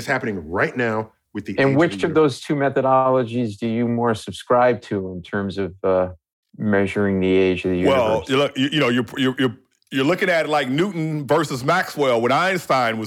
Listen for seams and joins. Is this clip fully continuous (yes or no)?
yes